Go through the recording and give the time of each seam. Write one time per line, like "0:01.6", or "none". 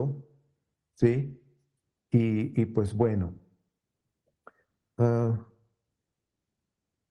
none